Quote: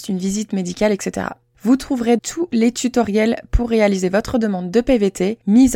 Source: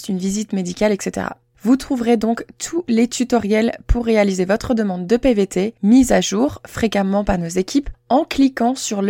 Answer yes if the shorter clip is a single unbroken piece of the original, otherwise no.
no